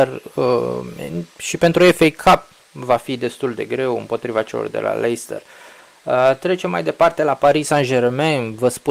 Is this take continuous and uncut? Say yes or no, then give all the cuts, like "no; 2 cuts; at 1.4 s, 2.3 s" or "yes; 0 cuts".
yes; 0 cuts